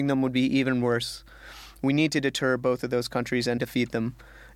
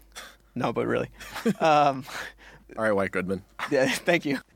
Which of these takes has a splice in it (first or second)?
first